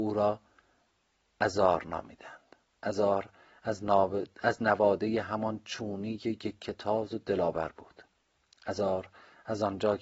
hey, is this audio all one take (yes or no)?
yes